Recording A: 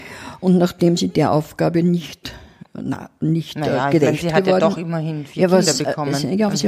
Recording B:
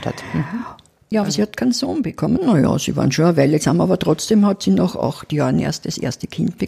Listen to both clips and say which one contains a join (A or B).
B